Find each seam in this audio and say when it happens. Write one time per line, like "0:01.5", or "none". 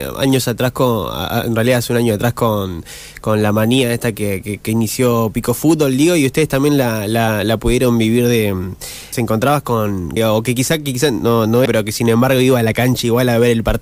0:09.1
0:10.2
0:11.7